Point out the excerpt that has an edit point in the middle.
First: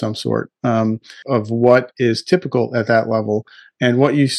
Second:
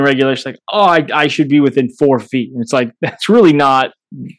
first; 1 cut; at 1.2 s

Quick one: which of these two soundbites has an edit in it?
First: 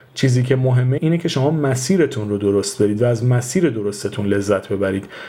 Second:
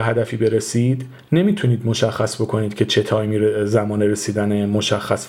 first; 1 cut; at 1.0 s

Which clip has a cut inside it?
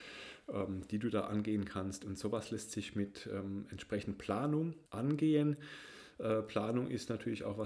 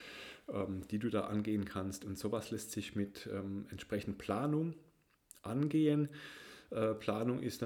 first; 1 cut; at 4.9 s

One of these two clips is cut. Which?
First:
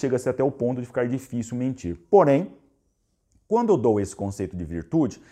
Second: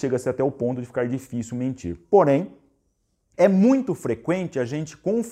second; 1 cut; at 3.3 s

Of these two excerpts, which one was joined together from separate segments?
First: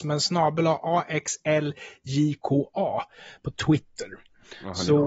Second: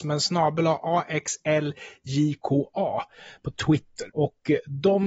second; 1 cut; at 4.1 s

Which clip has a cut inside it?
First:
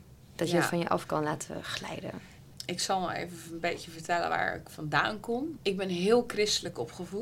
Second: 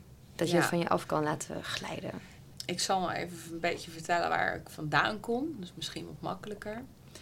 first; 1 cut; at 5.6 s

